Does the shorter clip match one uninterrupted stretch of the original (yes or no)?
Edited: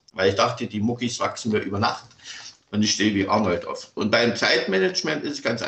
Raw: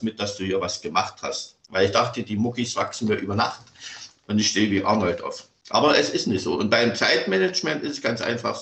no